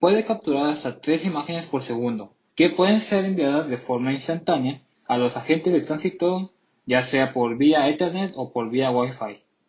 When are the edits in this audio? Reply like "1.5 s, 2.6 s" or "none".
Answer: 2.5 s